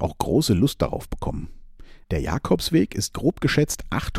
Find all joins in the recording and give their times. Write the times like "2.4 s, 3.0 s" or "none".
2.0 s

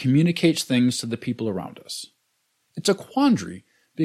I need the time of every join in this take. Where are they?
2.6 s

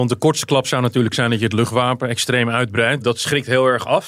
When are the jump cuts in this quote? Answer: 3.0 s

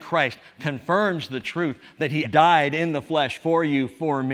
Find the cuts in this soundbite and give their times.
2.2 s

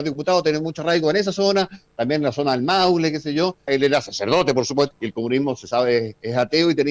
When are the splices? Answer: 3.7 s, 4.9 s

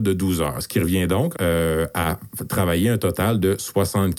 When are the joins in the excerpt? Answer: 1.3 s

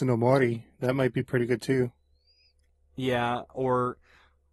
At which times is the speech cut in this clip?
none

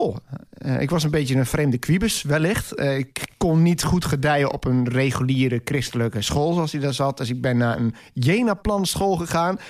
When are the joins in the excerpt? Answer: none

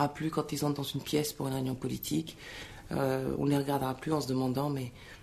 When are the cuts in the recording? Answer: none

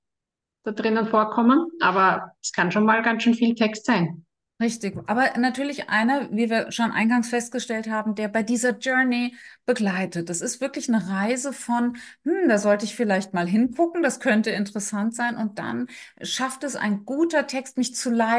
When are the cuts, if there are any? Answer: none

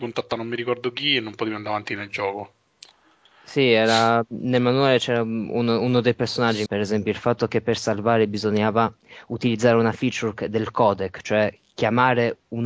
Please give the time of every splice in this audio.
6.7 s

